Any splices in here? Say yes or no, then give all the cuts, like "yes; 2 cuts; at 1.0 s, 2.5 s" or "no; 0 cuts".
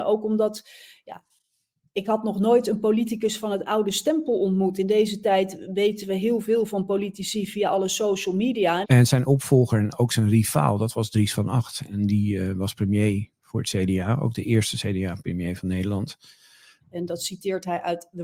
yes; 2 cuts; at 8.8 s, 16.8 s